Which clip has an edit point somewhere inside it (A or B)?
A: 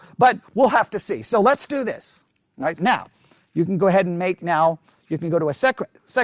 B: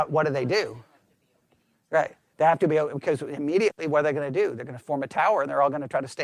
A